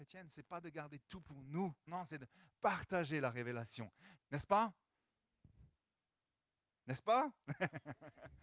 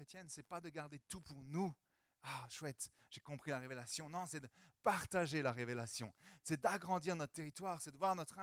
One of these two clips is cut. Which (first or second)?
first